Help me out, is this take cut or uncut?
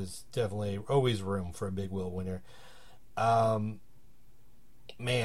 uncut